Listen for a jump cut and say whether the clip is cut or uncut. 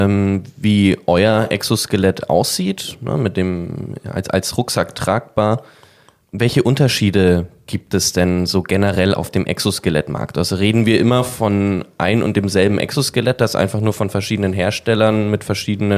uncut